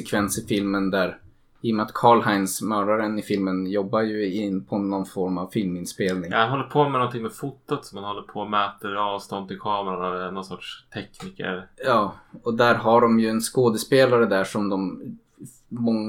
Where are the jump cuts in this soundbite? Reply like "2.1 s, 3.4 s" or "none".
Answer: none